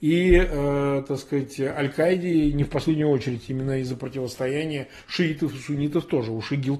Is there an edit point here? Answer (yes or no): no